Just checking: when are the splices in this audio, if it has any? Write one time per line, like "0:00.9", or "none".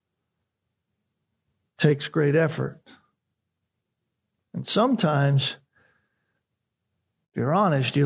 none